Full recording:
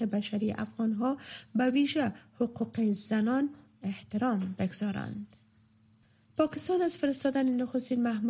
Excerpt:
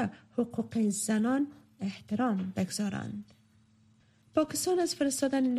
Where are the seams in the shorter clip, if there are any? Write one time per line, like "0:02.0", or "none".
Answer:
none